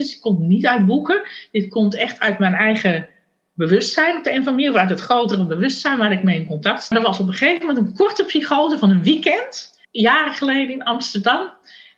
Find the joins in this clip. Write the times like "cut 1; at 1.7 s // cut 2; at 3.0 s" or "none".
cut 1; at 6.9 s // cut 2; at 9.8 s